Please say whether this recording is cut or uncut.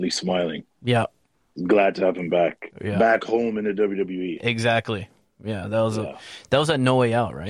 uncut